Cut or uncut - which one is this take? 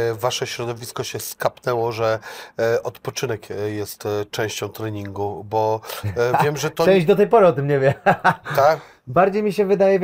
uncut